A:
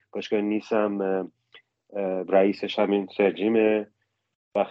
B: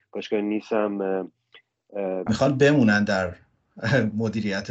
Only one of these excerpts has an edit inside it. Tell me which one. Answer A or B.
B